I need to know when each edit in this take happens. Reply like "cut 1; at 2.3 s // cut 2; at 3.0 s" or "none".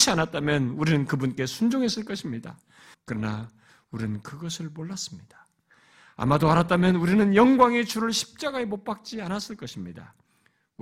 cut 1; at 2.9 s